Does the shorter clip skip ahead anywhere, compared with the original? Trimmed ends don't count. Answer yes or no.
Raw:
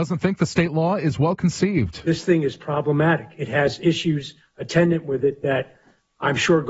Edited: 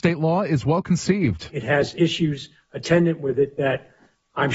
yes